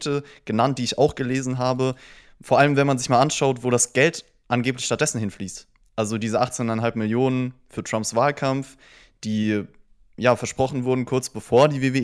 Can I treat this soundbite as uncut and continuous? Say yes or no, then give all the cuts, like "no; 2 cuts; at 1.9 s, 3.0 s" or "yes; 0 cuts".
yes; 0 cuts